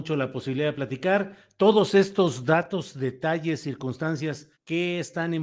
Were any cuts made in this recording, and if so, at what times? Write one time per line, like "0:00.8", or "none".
0:04.5

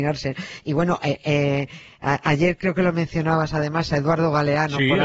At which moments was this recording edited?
none

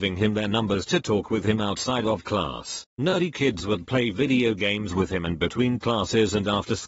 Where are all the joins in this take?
0:02.9

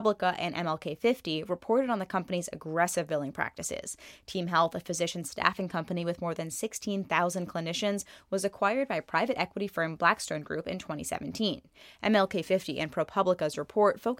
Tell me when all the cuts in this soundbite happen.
none

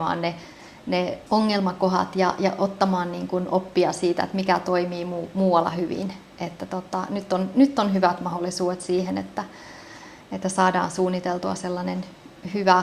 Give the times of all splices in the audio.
0:01.3

